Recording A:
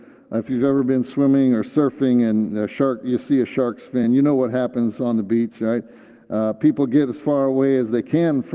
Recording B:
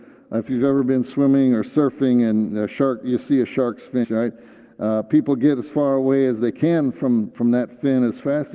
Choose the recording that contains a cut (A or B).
B